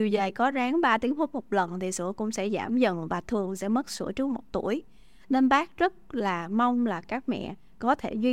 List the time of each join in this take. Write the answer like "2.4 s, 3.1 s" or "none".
none